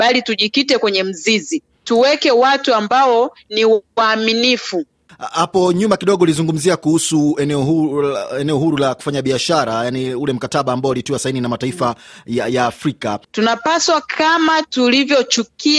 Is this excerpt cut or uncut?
cut